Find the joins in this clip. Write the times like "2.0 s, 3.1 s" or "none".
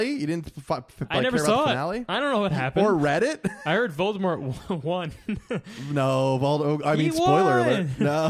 none